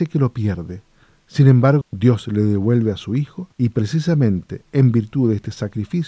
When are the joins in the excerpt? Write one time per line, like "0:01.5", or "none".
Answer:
0:01.8
0:03.5